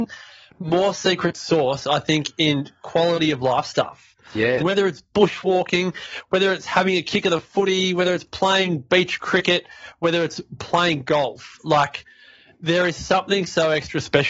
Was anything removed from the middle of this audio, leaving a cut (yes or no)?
yes